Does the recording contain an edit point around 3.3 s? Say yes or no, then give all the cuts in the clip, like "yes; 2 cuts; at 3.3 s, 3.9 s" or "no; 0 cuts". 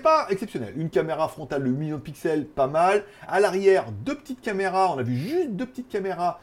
no; 0 cuts